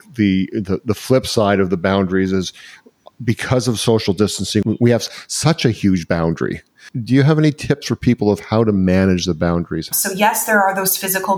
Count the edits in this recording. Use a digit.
1